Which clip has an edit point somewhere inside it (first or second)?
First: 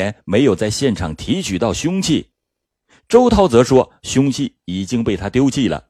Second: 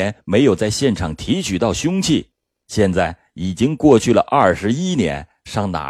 second